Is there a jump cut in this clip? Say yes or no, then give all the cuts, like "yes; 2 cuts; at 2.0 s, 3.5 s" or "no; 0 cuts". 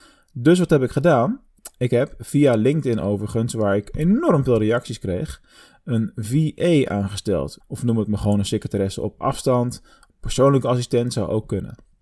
yes; 2 cuts; at 7.6 s, 10.1 s